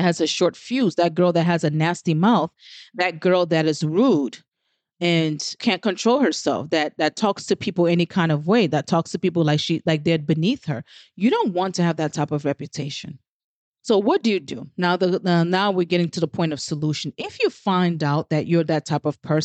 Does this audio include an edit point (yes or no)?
no